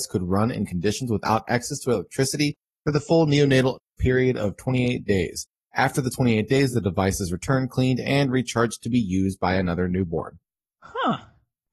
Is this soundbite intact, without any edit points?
yes; 0 cuts

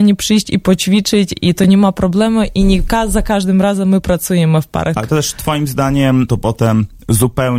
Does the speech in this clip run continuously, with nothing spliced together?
no; 2 cuts; at 5.0 s, 6.3 s

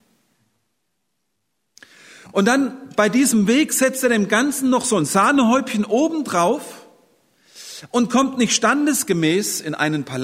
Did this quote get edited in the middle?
no; 0 cuts

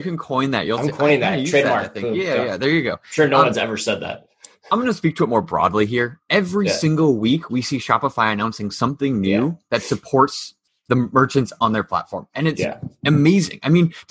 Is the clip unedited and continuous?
yes; 0 cuts

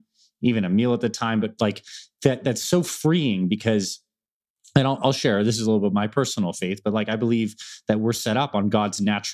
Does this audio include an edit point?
no; 0 cuts

